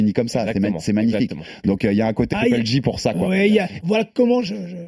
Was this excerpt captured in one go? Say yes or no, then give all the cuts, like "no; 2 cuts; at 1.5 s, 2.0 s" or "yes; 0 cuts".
no; 2 cuts; at 2.3 s, 3.8 s